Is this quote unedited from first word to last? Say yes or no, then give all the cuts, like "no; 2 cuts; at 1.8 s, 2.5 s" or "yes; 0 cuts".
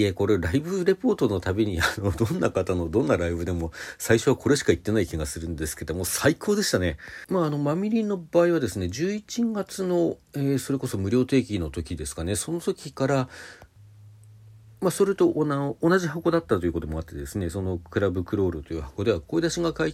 yes; 0 cuts